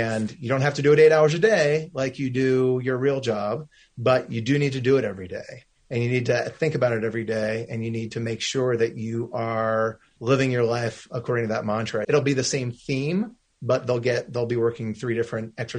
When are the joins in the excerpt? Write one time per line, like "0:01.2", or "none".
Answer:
0:10.2
0:12.0